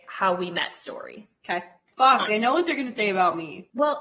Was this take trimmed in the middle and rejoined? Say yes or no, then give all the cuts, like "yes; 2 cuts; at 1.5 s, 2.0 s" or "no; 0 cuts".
yes; 1 cut; at 2.3 s